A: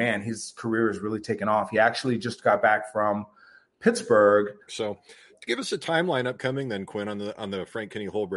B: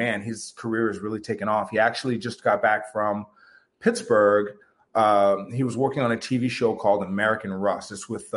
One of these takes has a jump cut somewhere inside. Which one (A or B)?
A